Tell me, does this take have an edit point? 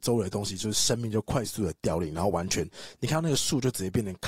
no; 0 cuts

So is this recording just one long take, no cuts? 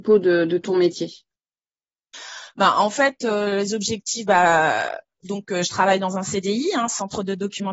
yes; 0 cuts

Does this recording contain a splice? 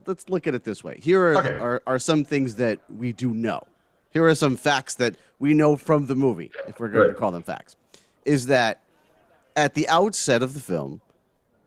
no; 0 cuts

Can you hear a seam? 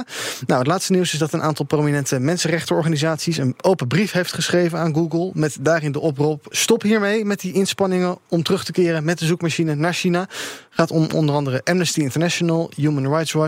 yes; 1 cut; at 6.5 s

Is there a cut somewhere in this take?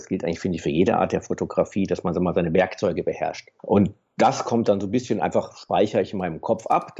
yes; 1 cut; at 3.6 s

